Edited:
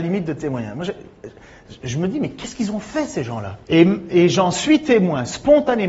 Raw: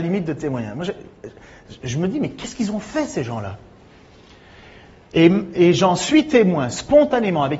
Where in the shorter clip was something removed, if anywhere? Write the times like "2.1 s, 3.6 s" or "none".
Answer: 3.6 s

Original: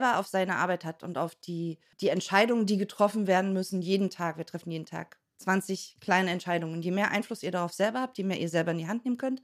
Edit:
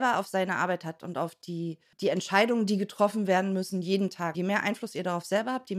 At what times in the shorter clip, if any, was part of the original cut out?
4.3 s

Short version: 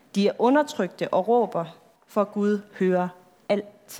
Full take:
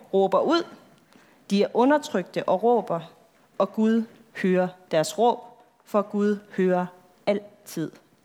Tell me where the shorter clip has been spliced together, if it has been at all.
2.0 s

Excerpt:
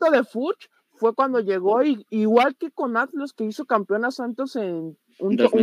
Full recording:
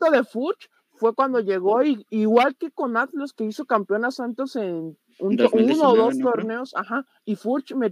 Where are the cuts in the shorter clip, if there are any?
none

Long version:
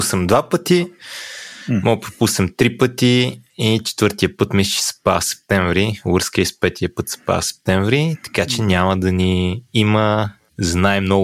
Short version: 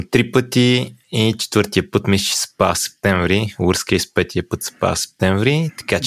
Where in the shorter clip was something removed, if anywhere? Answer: none

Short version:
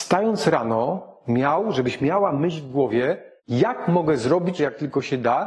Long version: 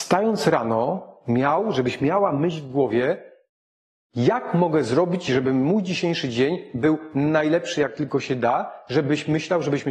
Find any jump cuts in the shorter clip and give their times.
3.4 s, 4.6 s

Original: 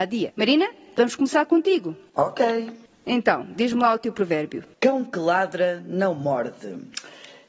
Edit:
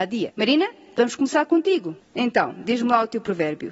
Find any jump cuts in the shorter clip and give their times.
2.0 s

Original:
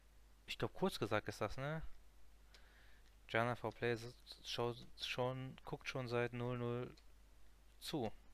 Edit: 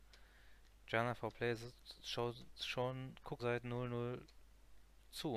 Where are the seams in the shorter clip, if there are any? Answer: 3.4 s

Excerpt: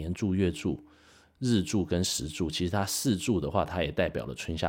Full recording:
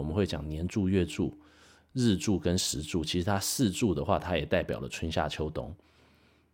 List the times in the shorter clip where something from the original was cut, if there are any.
none

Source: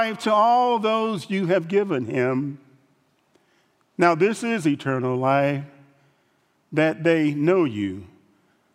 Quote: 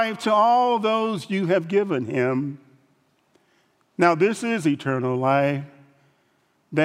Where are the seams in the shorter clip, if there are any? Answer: none

